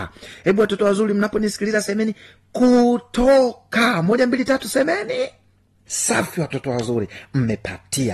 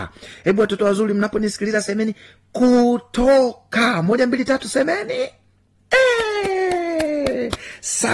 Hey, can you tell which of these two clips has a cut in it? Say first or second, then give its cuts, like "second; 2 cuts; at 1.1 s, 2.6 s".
first; 1 cut; at 5.9 s